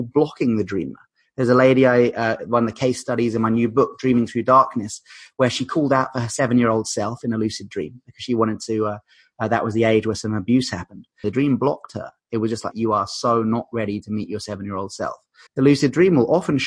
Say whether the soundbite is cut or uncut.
cut